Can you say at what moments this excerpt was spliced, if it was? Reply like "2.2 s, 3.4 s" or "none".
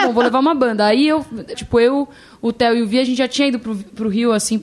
1.5 s